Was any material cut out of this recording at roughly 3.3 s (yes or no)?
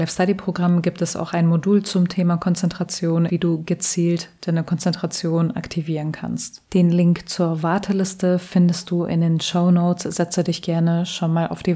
yes